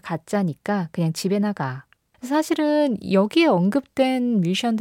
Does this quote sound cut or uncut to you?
cut